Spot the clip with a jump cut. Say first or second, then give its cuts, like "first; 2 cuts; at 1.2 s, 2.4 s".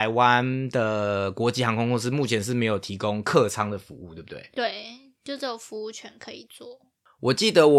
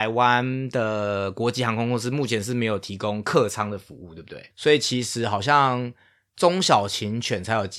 second; 1 cut; at 4.5 s